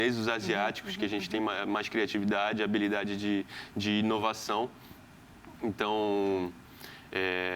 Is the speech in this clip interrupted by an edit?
no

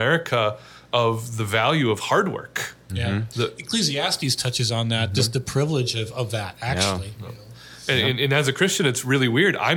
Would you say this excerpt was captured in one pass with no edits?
yes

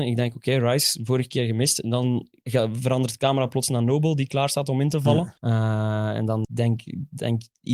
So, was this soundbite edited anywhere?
yes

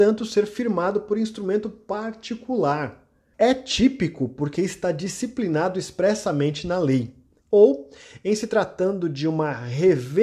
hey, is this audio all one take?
no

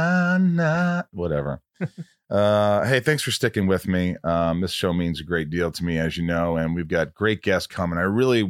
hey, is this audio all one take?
yes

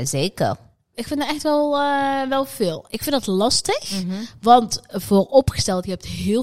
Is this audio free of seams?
no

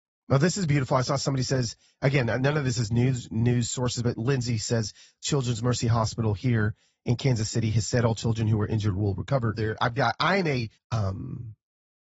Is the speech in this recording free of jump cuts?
no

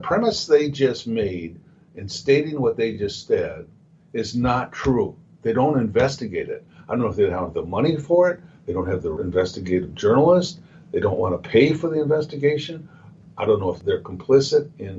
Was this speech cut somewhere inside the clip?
no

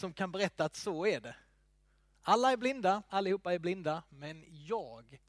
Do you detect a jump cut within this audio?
yes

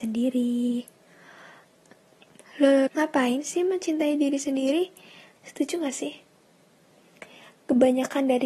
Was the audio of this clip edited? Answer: yes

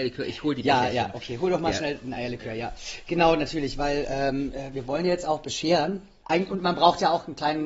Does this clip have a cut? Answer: no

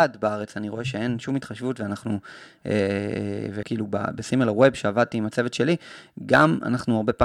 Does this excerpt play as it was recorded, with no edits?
no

